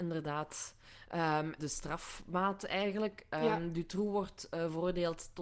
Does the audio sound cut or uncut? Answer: cut